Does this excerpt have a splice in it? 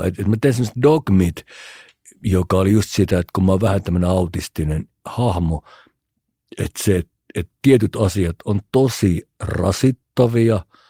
no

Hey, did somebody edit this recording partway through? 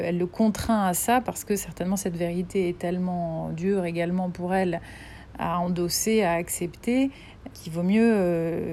yes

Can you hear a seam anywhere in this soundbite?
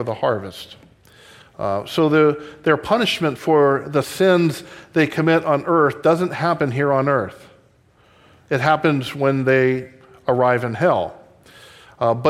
no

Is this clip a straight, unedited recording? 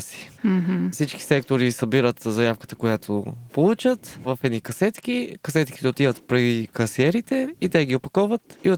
no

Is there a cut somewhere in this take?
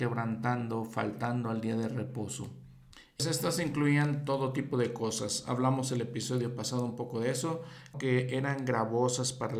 yes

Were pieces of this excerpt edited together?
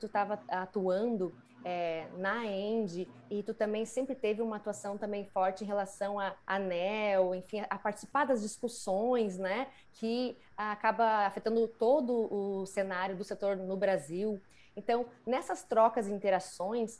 no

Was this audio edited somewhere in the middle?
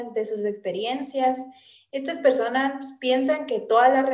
no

